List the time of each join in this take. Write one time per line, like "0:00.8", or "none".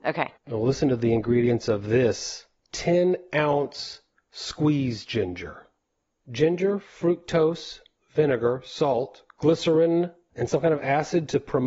none

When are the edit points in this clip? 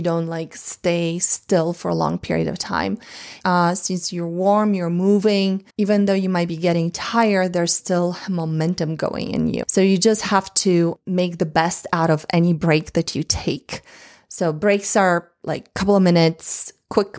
0:03.4
0:05.7
0:09.6

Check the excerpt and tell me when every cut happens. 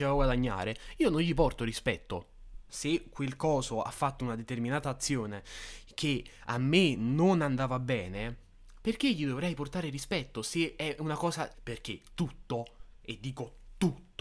0:02.7
0:11.5

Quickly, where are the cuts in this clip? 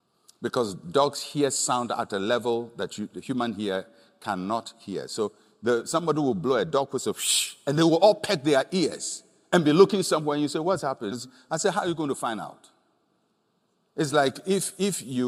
0:11.1
0:13.9

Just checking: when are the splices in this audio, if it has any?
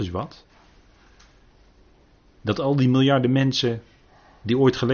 0:02.3

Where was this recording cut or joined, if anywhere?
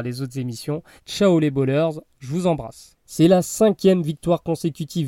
0:01.0
0:03.0

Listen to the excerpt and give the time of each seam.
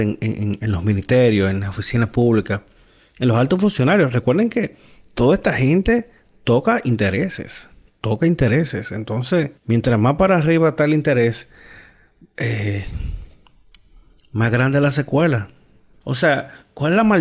0:09.6
0:16.0

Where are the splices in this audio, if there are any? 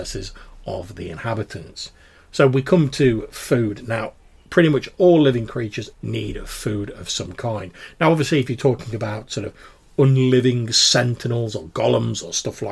0:05.9

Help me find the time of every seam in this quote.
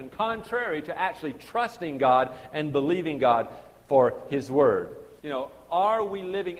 0:05.2

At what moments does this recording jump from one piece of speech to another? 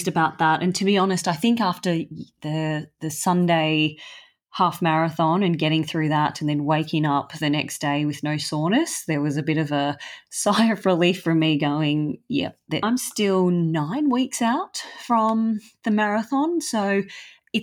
0:12.8

